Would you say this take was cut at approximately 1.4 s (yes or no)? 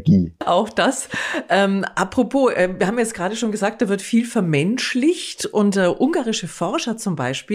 no